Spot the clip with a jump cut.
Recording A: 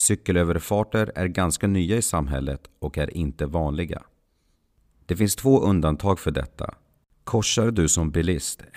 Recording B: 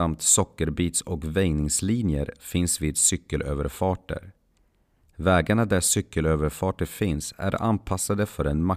A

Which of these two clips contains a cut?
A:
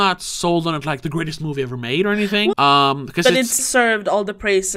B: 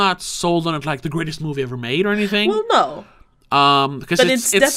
A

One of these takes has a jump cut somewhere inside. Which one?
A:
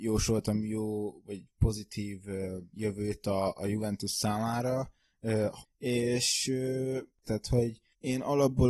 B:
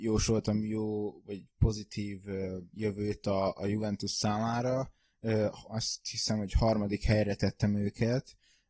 A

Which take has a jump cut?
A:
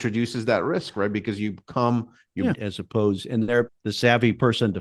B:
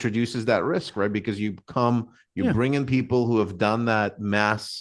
A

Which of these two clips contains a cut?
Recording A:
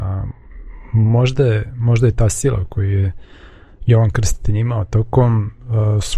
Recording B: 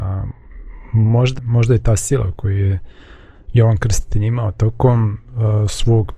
B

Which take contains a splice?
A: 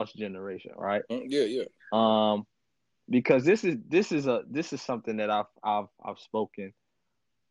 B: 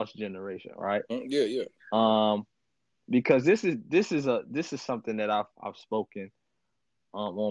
B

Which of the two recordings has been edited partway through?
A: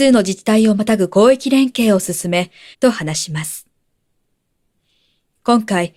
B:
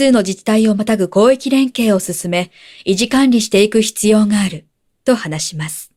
A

